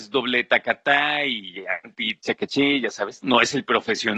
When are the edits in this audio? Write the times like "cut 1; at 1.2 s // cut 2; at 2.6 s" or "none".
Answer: cut 1; at 3.2 s